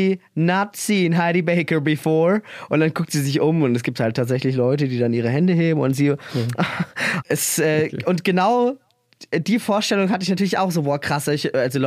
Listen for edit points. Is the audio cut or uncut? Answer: cut